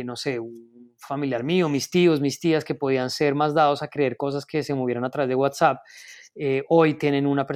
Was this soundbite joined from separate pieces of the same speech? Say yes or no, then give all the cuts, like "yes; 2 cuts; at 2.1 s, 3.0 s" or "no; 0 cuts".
no; 0 cuts